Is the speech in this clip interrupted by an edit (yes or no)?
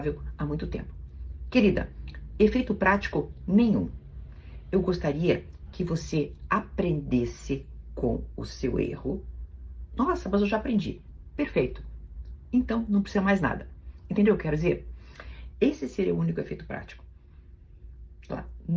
yes